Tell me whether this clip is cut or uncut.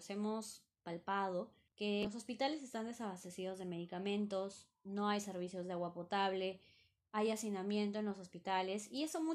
uncut